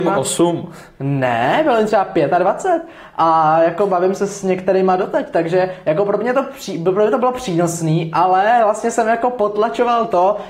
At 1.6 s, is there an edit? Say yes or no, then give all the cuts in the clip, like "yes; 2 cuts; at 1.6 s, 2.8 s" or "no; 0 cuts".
no; 0 cuts